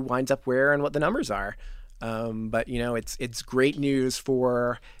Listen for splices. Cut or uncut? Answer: uncut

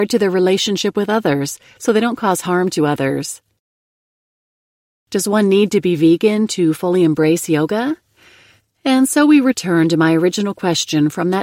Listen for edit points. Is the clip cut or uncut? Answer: uncut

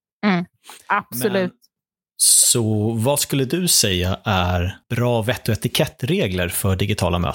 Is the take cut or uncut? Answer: cut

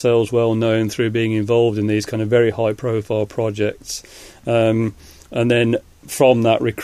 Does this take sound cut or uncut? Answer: uncut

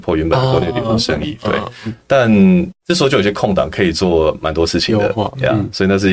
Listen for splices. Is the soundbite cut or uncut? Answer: uncut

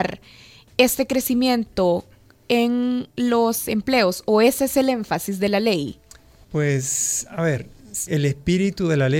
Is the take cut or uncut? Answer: cut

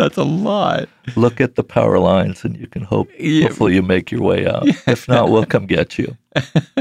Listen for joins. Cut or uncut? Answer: uncut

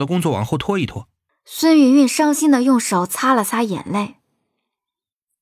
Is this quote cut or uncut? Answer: cut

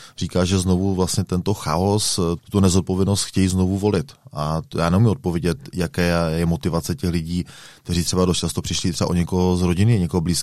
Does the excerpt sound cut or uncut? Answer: cut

